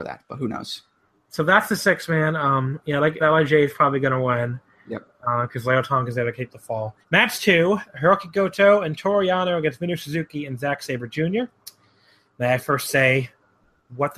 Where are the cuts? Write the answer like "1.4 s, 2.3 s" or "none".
3.2 s, 7.0 s